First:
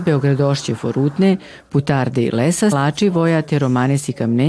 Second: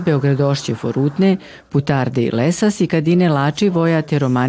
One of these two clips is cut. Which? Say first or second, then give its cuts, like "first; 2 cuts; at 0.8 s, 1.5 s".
first; 1 cut; at 2.7 s